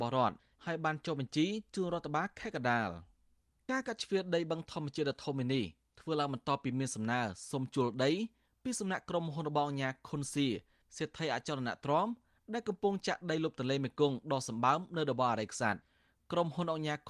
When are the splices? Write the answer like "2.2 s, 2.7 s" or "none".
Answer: none